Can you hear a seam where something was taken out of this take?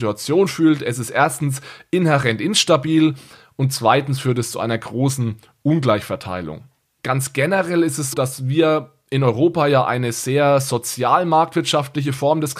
yes; 2 cuts; at 7.0 s, 8.1 s

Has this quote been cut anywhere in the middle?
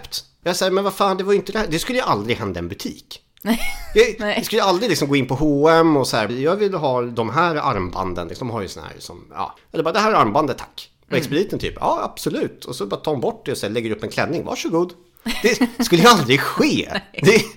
yes; 1 cut; at 6.3 s

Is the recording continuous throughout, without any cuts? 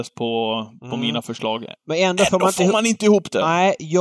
yes; 0 cuts

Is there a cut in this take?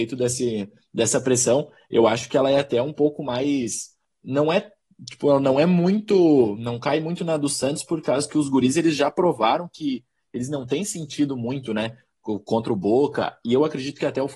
no; 0 cuts

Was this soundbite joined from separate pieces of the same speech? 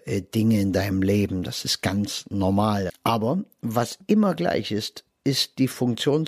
yes; 1 cut; at 2.9 s

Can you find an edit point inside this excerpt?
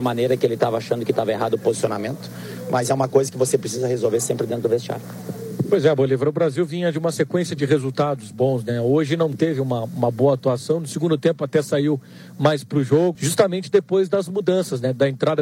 yes; 1 cut; at 13.2 s

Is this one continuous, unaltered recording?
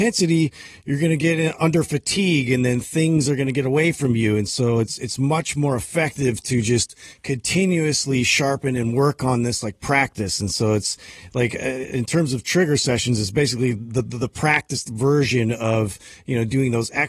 yes; 0 cuts

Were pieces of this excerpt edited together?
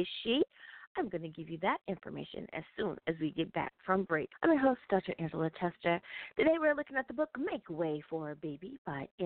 yes; 1 cut; at 4.3 s

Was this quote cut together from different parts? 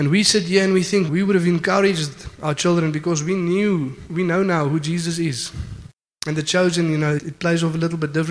yes; 3 cuts; at 1.1 s, 6.1 s, 7.2 s

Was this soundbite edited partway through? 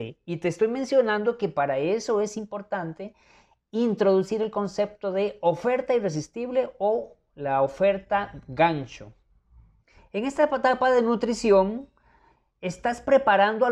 yes; 1 cut; at 10.0 s

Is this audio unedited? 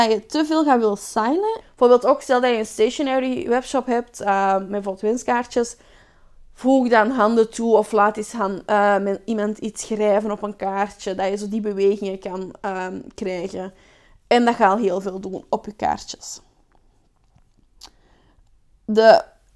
no; 1 cut; at 1.6 s

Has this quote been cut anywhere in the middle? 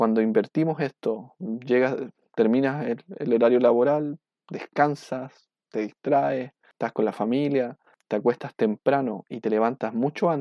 no; 0 cuts

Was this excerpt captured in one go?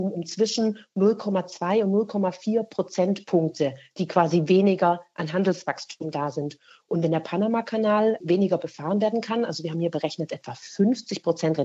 yes; 0 cuts

